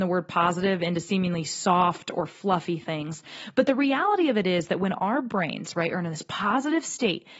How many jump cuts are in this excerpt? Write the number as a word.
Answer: zero